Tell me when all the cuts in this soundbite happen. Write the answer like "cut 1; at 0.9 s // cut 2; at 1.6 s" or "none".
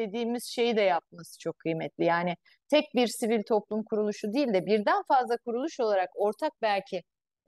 none